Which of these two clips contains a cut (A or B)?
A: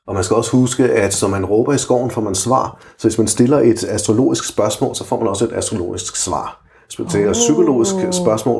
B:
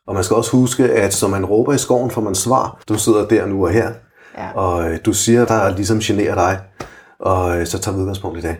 B